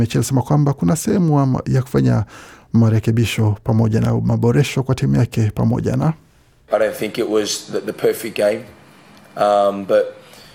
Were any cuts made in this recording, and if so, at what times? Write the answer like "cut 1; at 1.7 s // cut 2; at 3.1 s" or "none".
none